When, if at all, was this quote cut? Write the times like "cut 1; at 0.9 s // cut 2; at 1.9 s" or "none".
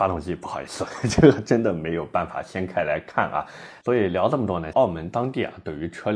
cut 1; at 4.7 s

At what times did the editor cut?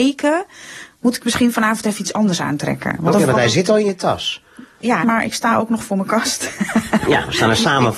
cut 1; at 5.0 s

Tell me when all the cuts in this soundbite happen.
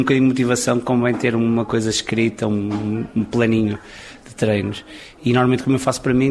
none

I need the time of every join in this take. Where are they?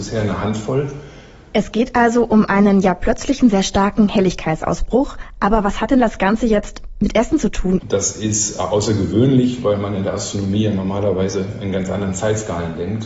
cut 1; at 1.5 s // cut 2; at 7.8 s

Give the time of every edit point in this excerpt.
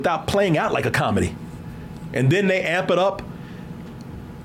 cut 1; at 2.1 s

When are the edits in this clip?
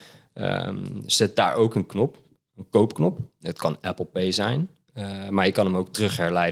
none

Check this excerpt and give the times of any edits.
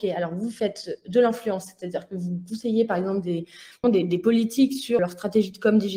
cut 1; at 3.8 s // cut 2; at 5.0 s

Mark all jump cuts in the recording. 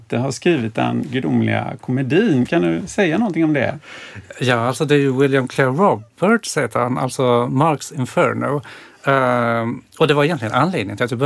none

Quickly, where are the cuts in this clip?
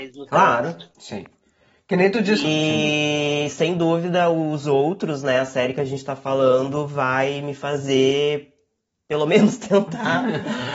cut 1; at 2.4 s

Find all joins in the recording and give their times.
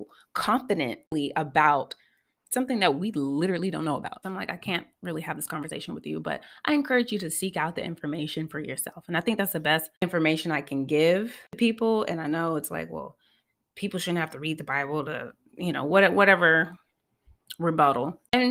cut 1; at 4.2 s

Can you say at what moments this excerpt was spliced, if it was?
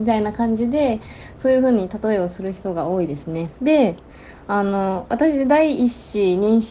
cut 1; at 3.6 s

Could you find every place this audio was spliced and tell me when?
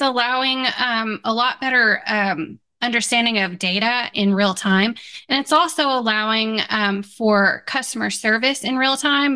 cut 1; at 4.1 s

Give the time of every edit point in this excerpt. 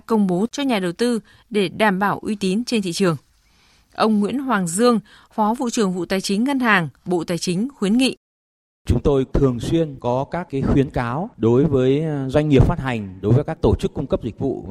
none

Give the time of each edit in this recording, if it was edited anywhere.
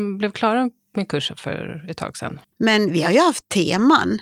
cut 1; at 2.5 s

